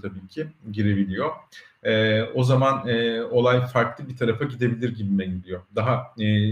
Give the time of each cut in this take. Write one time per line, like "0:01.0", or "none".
none